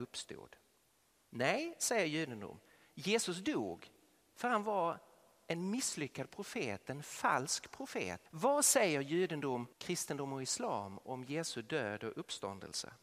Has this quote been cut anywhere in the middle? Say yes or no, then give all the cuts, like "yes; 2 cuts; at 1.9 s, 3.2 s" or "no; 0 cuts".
yes; 2 cuts; at 8.3 s, 9.7 s